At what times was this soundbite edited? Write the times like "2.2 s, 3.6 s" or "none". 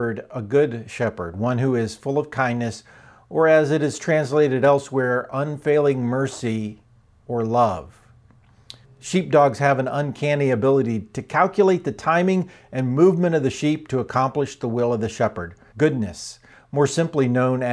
8.8 s, 15.7 s